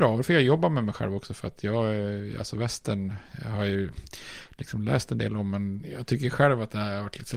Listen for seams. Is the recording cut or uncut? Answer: uncut